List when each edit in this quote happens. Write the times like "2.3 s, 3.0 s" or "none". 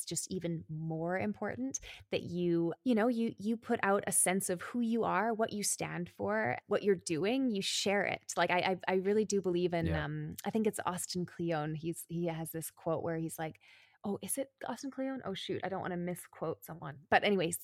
none